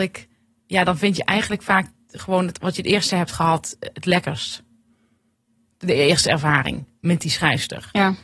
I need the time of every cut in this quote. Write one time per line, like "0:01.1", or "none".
none